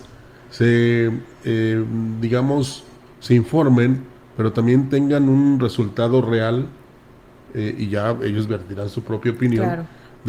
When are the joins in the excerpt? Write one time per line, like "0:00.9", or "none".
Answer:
none